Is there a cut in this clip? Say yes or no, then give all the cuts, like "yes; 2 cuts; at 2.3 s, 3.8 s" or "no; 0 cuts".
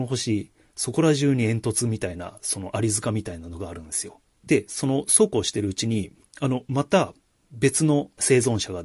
yes; 1 cut; at 4.3 s